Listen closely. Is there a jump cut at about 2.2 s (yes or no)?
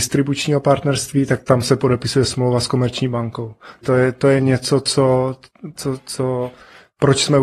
no